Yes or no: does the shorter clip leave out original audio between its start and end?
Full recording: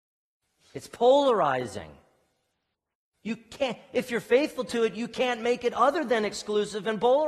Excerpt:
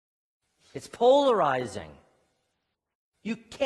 no